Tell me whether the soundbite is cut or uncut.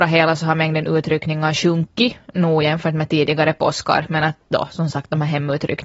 uncut